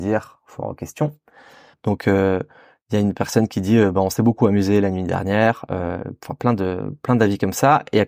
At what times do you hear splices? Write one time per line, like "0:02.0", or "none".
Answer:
0:01.7

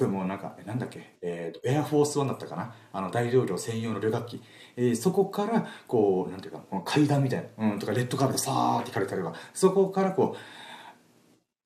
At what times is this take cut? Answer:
none

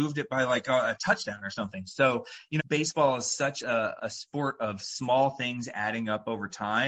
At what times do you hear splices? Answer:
0:02.6
0:04.0

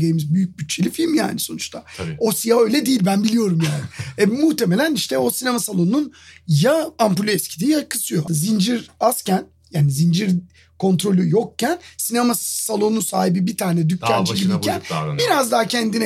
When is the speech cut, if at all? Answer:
0:08.3

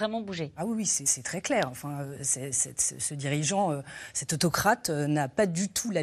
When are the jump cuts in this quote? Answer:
0:01.0

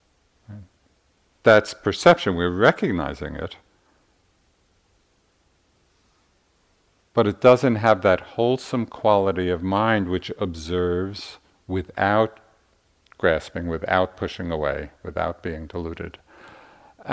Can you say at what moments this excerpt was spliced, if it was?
none

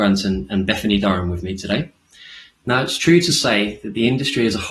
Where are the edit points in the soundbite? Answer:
0:02.5

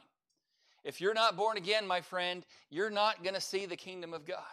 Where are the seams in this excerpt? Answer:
none

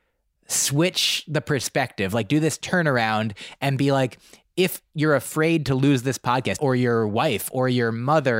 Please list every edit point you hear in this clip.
0:06.6

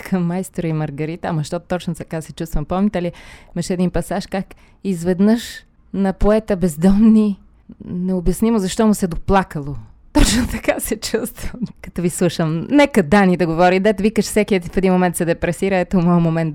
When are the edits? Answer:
0:11.7

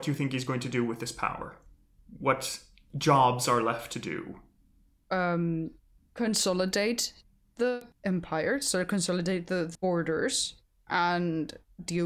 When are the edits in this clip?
none

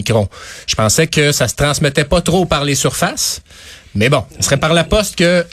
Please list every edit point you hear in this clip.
0:04.3

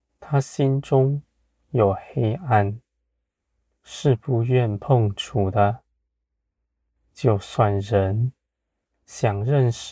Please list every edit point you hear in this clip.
none

